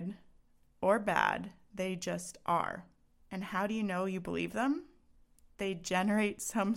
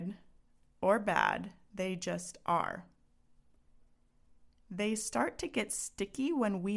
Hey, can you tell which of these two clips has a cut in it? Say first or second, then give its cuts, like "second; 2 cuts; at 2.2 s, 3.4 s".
first; 1 cut; at 3.2 s